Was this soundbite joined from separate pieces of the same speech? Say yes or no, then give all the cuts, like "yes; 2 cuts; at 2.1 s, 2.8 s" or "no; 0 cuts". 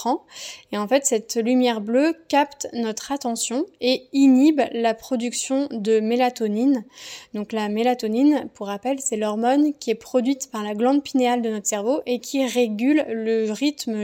no; 0 cuts